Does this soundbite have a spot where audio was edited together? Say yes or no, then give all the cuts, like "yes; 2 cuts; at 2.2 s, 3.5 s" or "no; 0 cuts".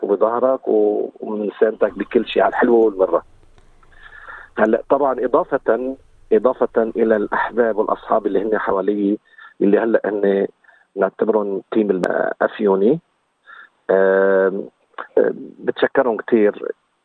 no; 0 cuts